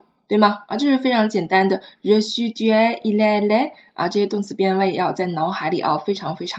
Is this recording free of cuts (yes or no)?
yes